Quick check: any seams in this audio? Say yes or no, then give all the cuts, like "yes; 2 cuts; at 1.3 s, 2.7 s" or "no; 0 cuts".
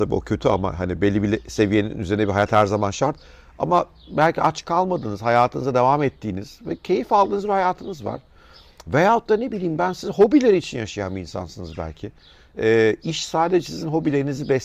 no; 0 cuts